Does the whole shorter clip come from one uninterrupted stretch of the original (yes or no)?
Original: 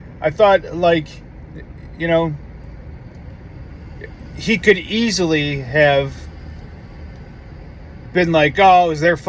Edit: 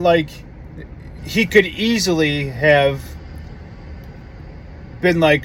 no